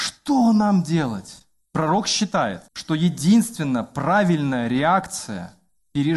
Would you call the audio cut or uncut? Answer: cut